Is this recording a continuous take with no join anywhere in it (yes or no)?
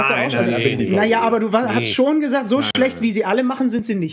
yes